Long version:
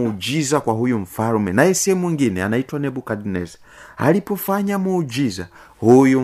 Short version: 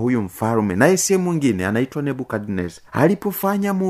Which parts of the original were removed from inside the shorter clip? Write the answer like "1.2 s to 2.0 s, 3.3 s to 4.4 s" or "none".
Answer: 3.6 s to 3.9 s